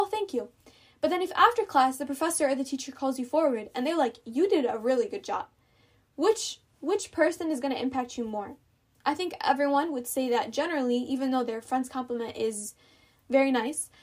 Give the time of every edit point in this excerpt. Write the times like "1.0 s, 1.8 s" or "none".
none